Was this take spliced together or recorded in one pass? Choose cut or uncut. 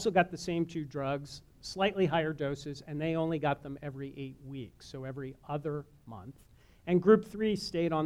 uncut